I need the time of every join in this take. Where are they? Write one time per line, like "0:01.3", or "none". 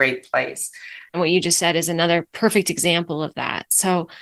0:01.1

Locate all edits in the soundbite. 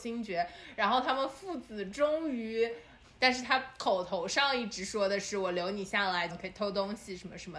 0:03.0
0:06.3

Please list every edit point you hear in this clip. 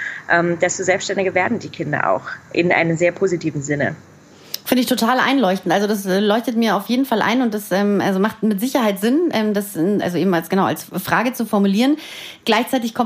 0:10.0

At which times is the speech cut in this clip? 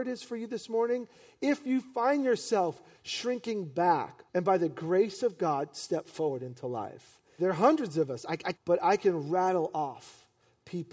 0:04.3
0:07.4
0:08.5

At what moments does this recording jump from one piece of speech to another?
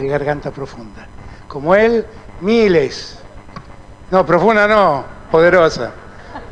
0:04.1

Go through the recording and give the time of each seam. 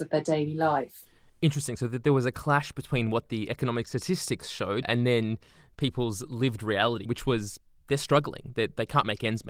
0:04.8
0:07.1

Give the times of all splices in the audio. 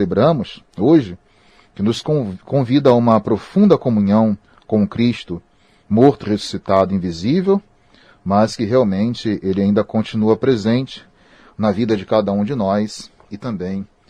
none

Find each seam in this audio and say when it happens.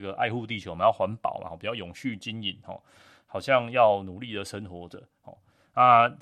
none

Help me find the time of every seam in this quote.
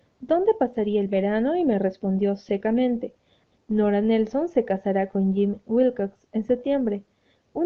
0:03.5

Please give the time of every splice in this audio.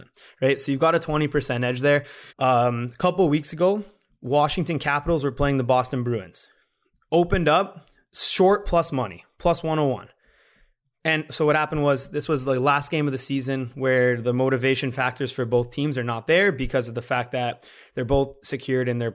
0:02.3
0:11.0

